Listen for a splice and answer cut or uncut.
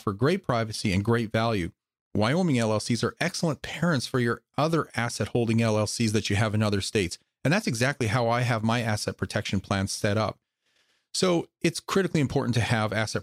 uncut